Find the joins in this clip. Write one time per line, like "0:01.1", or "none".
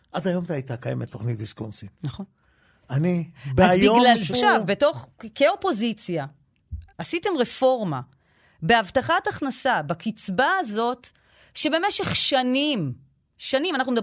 0:04.3
0:06.9